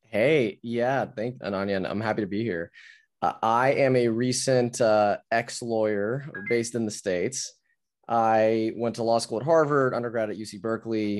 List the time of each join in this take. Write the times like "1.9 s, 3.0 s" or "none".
1.4 s